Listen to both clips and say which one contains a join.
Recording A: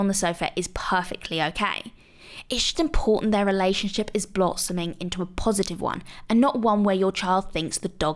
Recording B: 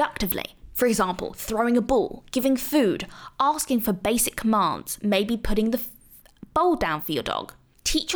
A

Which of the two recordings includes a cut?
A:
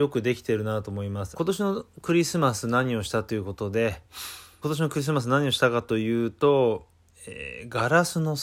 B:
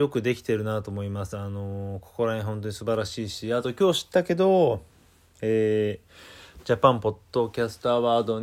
A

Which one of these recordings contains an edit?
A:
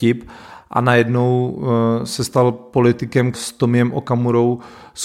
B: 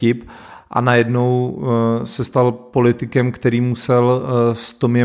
A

